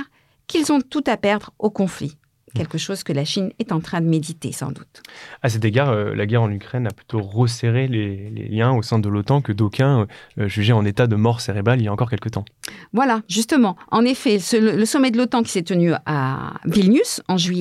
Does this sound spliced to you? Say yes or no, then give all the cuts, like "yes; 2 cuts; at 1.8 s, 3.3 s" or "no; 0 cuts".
no; 0 cuts